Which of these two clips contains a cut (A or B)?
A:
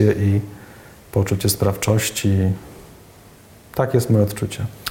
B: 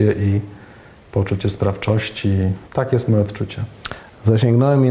B